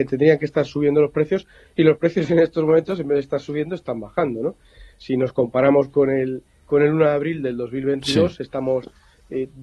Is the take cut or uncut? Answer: uncut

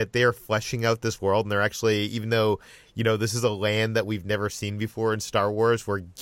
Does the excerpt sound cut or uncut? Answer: uncut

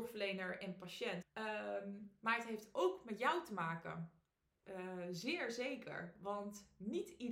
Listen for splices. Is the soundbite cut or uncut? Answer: cut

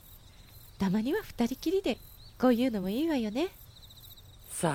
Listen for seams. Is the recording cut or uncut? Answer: uncut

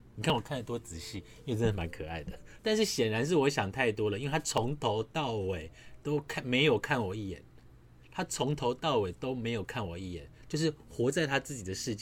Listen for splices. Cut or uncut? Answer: cut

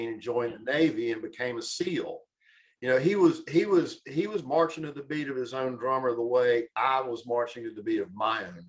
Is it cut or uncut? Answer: uncut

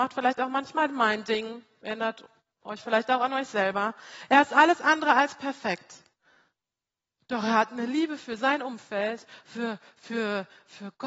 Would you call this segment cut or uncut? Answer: uncut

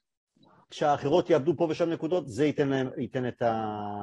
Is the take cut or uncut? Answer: uncut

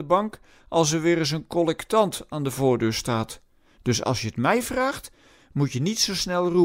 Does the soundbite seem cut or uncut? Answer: uncut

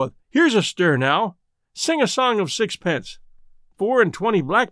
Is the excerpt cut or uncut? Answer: cut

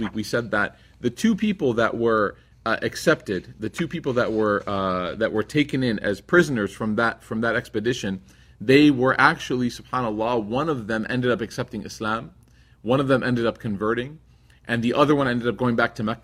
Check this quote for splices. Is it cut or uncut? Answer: uncut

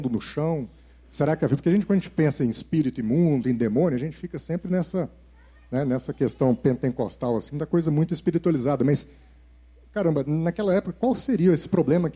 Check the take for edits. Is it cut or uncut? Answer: uncut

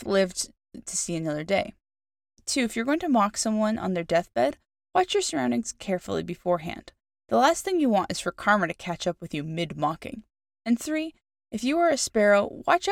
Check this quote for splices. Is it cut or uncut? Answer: uncut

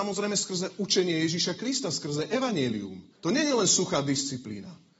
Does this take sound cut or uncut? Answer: cut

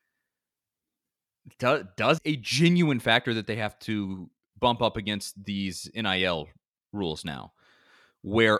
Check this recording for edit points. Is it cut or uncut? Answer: cut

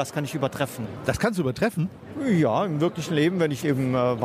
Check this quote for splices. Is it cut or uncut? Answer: uncut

